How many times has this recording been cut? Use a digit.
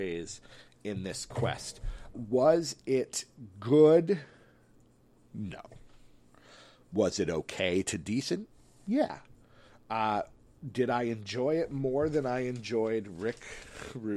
1